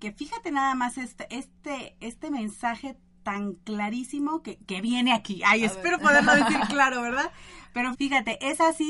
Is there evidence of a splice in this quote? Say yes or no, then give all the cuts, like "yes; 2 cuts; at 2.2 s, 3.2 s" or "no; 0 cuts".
yes; 1 cut; at 7.9 s